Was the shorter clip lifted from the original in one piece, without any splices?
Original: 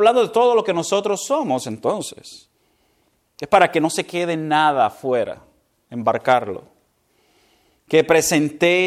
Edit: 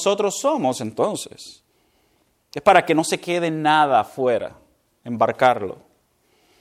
yes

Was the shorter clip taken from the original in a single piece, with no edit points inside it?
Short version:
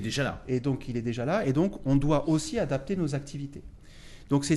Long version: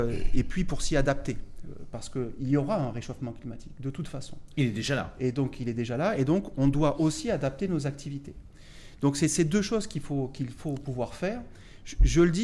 yes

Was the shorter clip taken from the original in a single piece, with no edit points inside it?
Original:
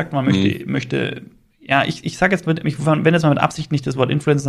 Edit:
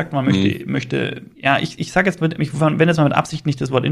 no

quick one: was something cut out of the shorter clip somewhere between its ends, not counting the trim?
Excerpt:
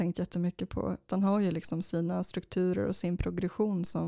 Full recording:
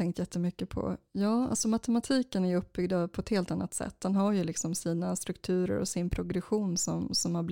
yes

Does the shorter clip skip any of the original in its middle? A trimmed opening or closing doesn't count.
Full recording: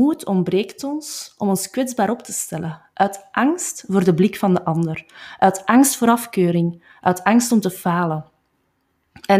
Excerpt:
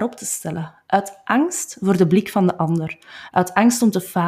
yes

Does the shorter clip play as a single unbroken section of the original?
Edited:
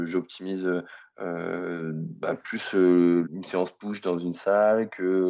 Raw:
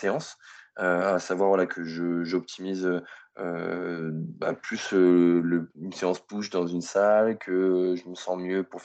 no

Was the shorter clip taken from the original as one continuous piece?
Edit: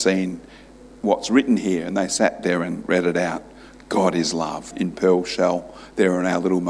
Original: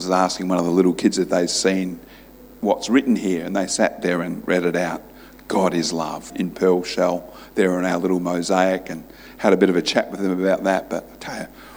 yes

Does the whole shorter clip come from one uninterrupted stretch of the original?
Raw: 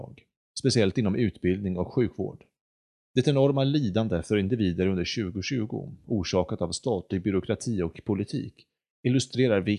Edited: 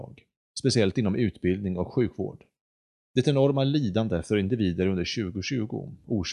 yes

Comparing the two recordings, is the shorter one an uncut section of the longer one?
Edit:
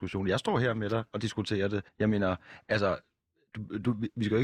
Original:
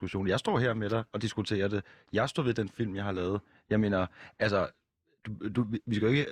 no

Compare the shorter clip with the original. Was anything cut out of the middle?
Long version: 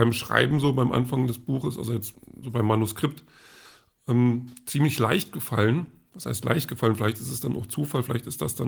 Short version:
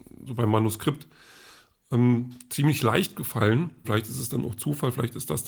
yes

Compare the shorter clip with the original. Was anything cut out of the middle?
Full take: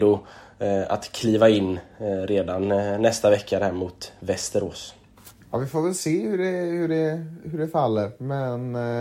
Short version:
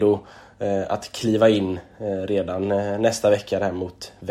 no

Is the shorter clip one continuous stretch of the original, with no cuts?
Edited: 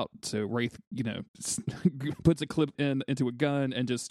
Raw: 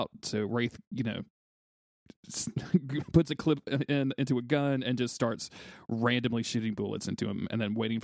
no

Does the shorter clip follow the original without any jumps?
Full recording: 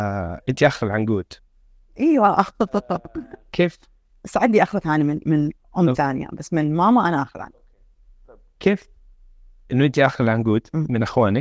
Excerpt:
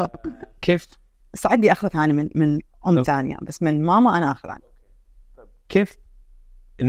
yes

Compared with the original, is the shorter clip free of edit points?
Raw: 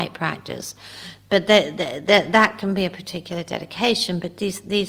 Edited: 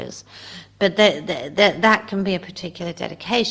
yes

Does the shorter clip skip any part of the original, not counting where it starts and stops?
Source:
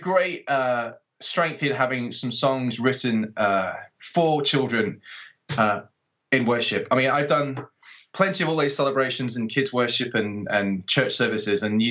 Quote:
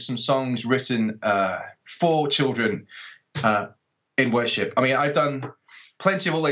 no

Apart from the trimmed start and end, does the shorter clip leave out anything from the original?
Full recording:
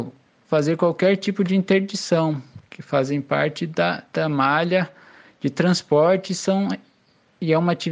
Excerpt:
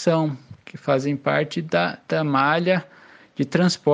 no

